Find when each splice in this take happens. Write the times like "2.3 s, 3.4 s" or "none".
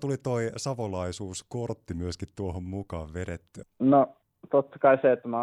3.6 s